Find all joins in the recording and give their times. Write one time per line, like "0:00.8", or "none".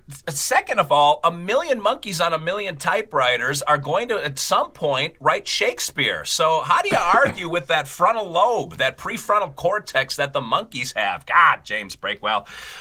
none